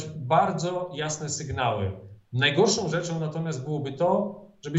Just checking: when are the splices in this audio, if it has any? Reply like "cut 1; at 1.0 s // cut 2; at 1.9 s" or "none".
none